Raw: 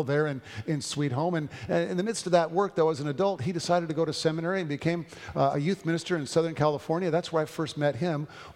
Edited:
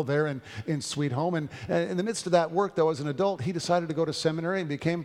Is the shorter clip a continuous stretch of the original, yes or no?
yes